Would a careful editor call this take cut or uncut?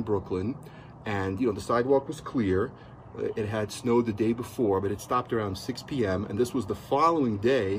uncut